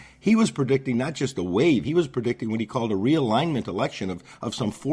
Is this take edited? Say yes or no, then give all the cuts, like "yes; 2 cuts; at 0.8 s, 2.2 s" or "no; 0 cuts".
no; 0 cuts